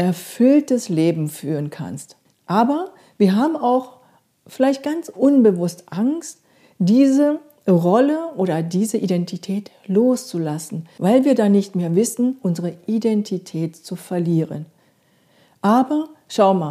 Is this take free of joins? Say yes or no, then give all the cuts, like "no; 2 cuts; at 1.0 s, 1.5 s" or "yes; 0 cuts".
no; 2 cuts; at 2.3 s, 12.4 s